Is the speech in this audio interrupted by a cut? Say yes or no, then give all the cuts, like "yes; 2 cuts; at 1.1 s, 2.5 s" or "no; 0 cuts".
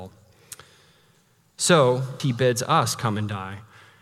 yes; 1 cut; at 2.2 s